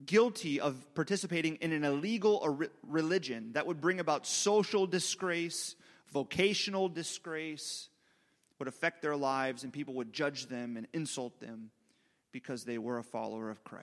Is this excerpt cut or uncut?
uncut